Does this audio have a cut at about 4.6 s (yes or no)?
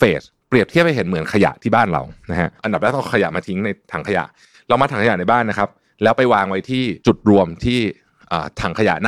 no